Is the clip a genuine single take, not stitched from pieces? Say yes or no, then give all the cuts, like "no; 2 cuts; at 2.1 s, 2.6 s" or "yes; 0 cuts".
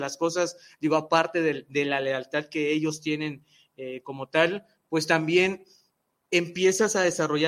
yes; 0 cuts